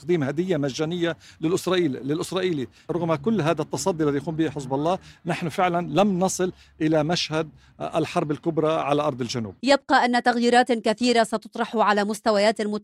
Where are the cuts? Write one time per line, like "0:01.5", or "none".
0:09.6